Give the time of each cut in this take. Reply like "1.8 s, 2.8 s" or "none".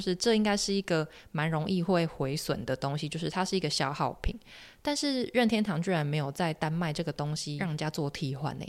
none